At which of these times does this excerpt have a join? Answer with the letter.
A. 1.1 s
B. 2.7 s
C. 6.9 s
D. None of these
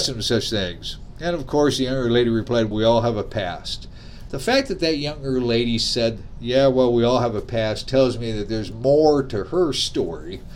B